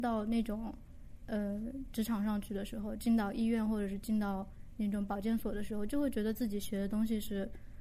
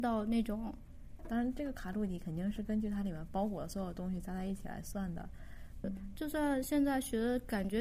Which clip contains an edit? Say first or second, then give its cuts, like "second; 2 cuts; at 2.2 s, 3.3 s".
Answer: second; 2 cuts; at 1.2 s, 5.8 s